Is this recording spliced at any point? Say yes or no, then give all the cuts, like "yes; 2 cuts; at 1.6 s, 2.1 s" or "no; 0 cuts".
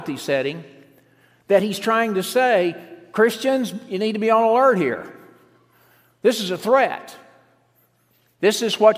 no; 0 cuts